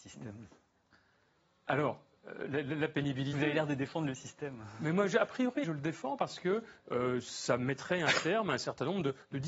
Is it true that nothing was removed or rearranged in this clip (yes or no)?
no